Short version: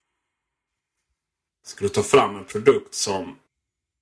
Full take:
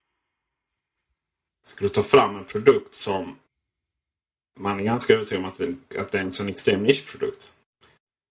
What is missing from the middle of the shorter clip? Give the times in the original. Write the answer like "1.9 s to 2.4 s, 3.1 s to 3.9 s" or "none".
none